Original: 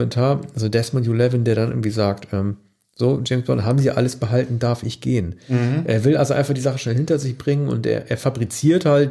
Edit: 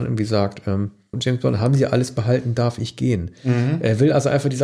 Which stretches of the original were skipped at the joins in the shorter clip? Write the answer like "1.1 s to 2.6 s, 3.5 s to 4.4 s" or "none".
2.8 s to 3.2 s